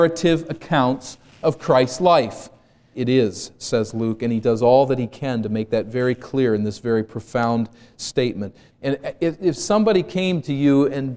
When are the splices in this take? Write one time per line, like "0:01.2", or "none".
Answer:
0:02.9
0:08.7